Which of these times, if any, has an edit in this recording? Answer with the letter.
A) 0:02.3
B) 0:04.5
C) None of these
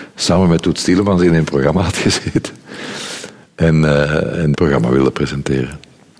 B